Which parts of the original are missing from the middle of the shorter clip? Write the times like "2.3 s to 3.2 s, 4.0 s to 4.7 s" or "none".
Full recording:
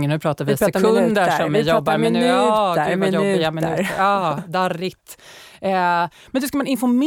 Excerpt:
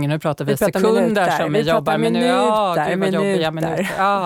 none

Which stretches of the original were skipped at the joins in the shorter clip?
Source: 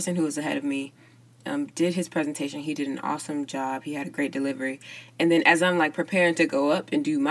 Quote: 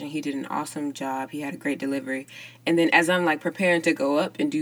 none

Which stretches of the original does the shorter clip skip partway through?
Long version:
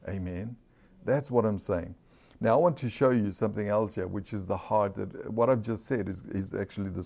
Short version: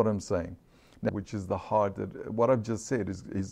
2.5 s to 4.1 s

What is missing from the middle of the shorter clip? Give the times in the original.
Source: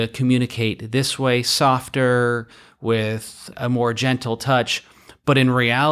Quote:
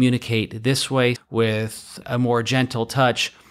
1.4 s to 2.7 s

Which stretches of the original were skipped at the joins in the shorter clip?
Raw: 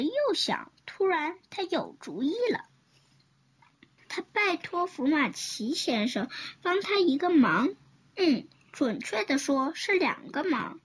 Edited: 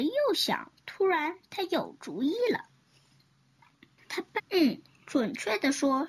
4.4 s to 8.0 s

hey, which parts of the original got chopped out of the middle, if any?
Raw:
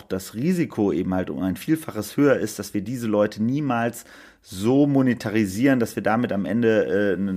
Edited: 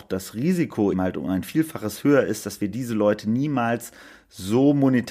0.9 s to 1.1 s

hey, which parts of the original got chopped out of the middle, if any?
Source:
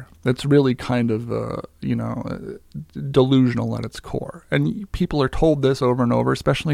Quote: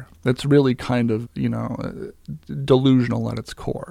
1.2 s to 1.7 s

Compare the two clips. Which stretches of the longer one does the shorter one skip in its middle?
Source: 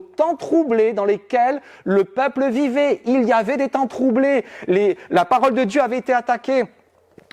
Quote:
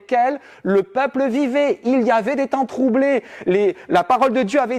none

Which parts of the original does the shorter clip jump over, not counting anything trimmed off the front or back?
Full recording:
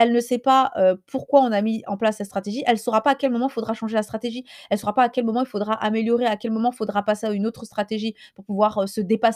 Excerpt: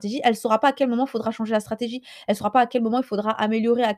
none

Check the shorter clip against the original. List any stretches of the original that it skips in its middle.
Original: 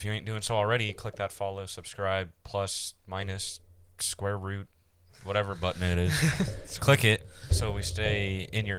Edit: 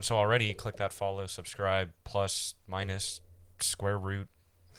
none

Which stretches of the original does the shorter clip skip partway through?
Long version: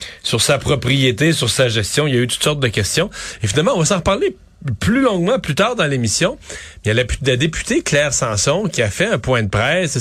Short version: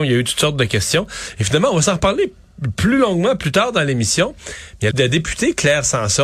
6.9 s to 7.2 s

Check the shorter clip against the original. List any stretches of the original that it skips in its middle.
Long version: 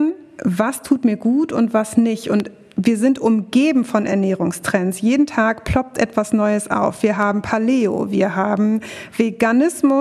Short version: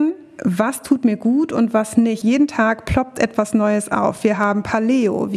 2.2 s to 5.0 s

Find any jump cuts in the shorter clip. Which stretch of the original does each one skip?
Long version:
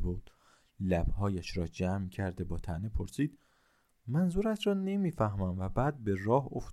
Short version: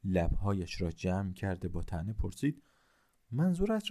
none

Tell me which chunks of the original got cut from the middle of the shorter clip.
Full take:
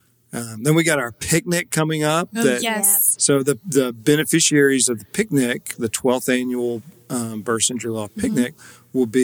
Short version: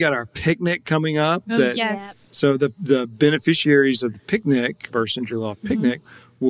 5.8 s to 7.4 s

